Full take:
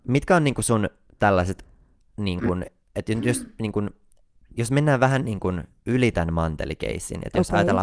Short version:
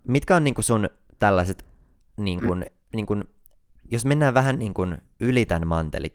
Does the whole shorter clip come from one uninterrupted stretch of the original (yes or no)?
no